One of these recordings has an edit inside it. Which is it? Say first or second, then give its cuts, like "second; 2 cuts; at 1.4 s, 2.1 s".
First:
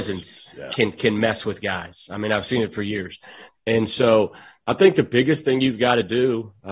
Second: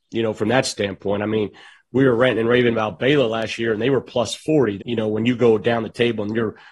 second; 1 cut; at 4.8 s